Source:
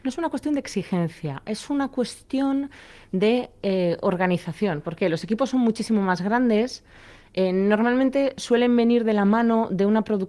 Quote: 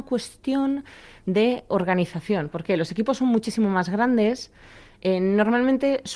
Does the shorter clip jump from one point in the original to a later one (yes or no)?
yes